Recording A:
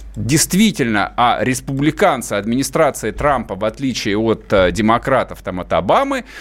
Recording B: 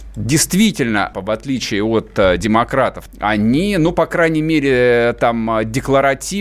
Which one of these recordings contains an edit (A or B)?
B